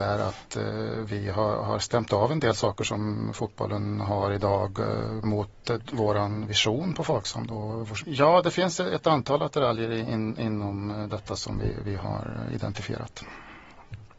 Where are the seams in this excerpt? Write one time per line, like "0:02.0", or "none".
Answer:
0:08.0